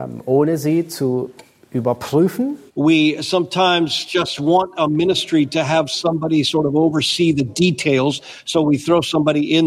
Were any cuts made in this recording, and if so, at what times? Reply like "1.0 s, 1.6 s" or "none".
2.7 s